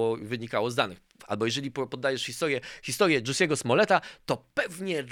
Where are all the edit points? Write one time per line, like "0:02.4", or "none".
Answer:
0:01.2